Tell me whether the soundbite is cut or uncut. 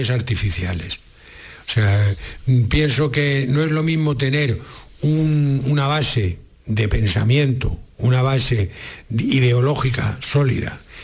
uncut